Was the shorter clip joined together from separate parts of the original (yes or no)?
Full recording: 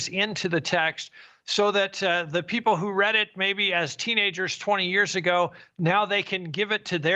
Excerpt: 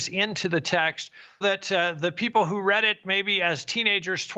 yes